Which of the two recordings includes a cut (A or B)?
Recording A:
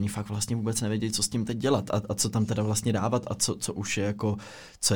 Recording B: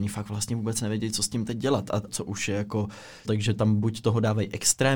B